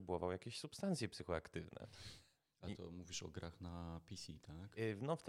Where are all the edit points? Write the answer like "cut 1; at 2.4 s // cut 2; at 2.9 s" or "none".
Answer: none